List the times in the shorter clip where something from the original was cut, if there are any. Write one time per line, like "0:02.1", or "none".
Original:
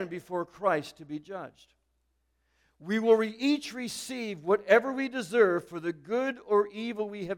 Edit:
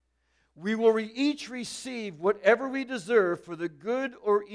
none